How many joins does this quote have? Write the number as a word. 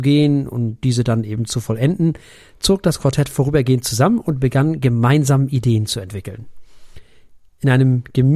zero